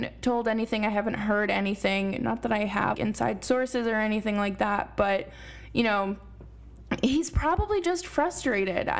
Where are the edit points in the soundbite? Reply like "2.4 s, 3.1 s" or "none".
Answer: 2.9 s